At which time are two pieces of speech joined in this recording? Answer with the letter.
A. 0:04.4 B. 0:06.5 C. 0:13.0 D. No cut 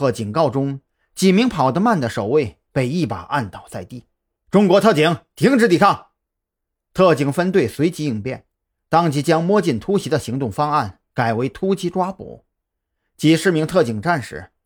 A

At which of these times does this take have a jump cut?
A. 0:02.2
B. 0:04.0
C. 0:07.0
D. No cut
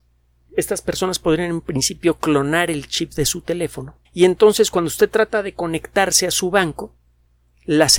B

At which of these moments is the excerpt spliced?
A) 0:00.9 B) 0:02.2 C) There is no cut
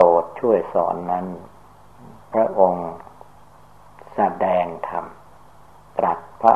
C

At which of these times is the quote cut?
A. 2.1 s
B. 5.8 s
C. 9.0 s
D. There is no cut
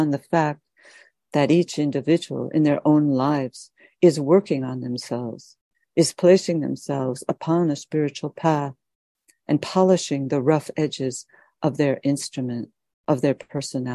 D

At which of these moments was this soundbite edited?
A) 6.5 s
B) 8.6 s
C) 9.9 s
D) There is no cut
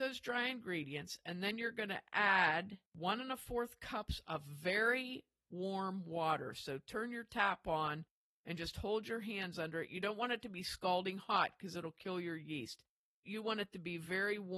D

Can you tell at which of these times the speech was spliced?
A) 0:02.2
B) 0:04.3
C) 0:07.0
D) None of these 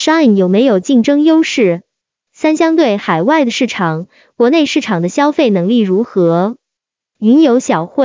C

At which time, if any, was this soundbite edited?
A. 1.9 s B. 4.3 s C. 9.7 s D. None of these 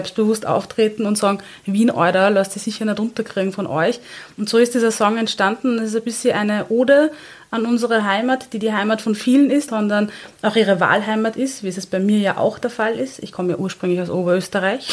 C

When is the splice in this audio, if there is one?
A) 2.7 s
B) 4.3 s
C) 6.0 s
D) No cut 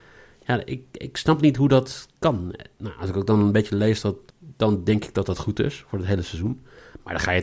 B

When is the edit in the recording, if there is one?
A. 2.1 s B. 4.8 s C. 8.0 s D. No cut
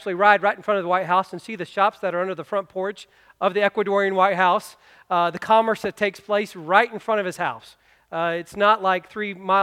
D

